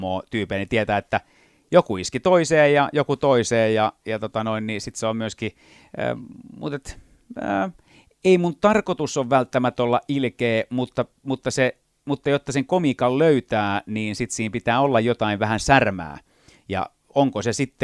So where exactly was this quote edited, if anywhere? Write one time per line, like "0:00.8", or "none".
none